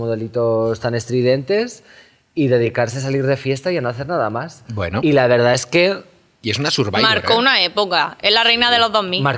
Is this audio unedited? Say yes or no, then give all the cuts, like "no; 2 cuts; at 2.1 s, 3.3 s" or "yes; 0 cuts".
yes; 0 cuts